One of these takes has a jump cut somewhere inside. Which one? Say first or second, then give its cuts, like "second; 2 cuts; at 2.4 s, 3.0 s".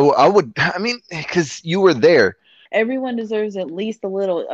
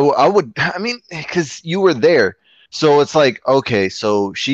first; 1 cut; at 2.7 s